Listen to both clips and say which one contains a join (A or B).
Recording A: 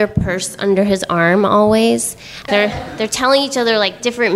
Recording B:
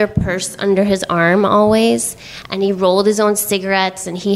A